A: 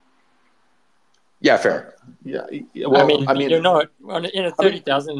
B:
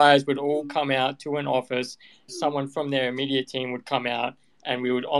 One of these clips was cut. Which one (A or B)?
B